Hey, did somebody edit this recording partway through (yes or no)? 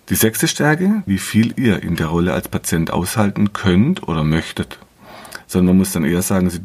yes